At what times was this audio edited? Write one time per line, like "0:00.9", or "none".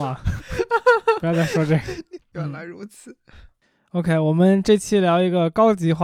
0:02.2